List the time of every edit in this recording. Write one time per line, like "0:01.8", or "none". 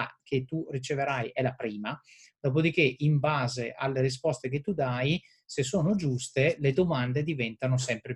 none